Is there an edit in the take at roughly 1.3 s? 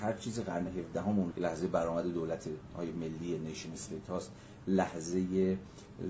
yes; 1 cut; at 1.3 s

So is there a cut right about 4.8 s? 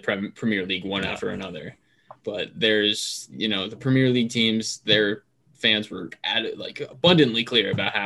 no; 1 cut; at 2.2 s

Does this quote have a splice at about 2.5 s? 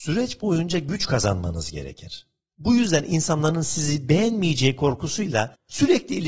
yes; 1 cut; at 2.5 s

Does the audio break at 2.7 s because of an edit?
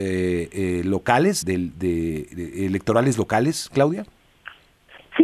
no; 1 cut; at 1.4 s

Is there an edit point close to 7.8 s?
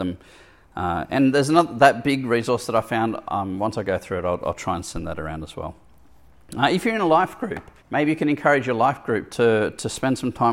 yes; 1 cut; at 7.8 s

